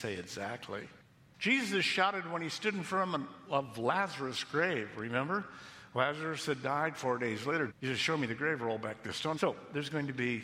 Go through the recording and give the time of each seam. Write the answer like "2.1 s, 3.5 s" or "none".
7.7 s, 9.3 s